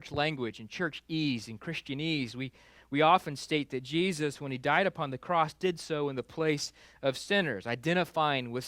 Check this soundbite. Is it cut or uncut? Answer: uncut